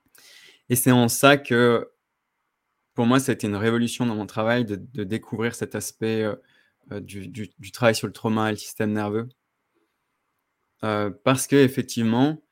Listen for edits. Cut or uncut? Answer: uncut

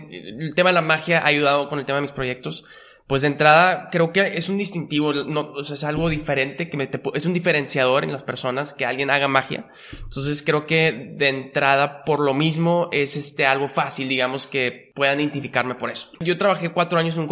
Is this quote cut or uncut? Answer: uncut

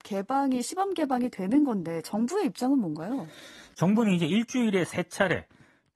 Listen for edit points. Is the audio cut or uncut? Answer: uncut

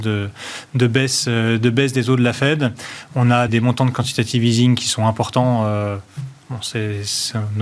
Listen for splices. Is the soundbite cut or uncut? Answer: cut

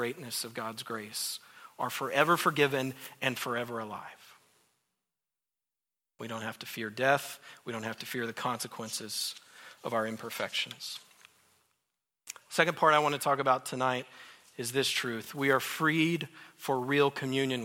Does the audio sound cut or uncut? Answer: uncut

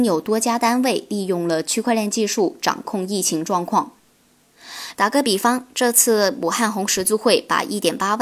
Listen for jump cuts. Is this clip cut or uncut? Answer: cut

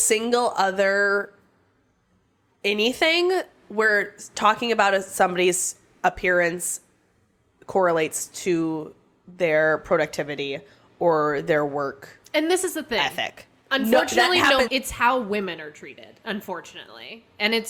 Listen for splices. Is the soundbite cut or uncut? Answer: cut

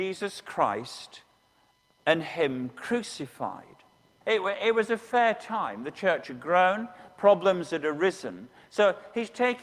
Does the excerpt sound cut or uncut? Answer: cut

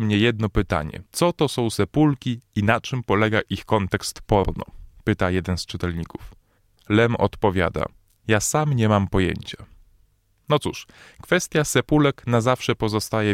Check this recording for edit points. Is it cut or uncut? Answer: cut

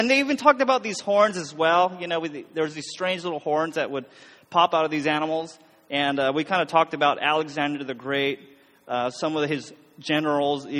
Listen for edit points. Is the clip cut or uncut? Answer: uncut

